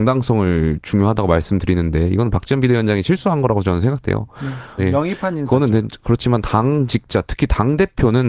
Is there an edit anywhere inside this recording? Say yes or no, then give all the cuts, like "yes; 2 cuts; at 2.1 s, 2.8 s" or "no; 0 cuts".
yes; 1 cut; at 4.8 s